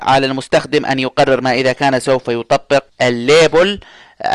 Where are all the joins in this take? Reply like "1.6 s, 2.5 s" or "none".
2.9 s